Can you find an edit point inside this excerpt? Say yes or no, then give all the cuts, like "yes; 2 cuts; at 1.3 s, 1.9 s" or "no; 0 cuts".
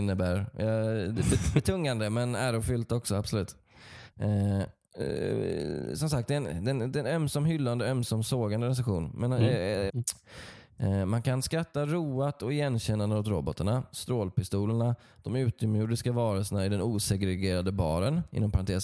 yes; 2 cuts; at 4.9 s, 9.9 s